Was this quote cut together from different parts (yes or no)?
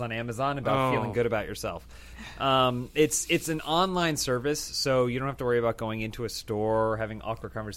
yes